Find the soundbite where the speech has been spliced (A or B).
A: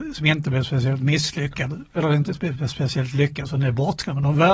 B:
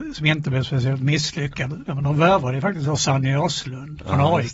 B